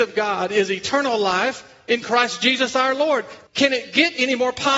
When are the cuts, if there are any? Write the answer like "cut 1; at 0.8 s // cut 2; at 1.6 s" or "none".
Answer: cut 1; at 3.5 s